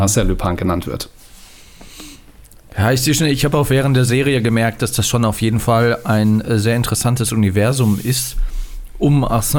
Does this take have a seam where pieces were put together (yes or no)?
no